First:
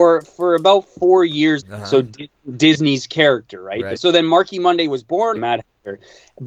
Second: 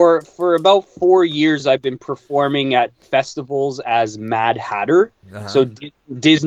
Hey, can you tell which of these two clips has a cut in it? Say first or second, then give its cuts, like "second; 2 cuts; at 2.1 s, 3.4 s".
first; 3 cuts; at 1.6 s, 4.0 s, 5.4 s